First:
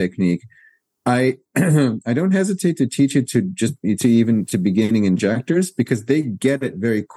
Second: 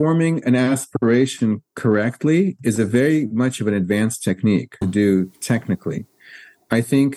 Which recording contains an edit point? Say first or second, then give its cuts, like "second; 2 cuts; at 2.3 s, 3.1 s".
second; 1 cut; at 4.8 s